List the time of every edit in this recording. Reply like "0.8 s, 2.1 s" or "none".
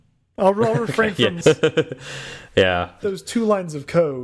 1.4 s, 3.0 s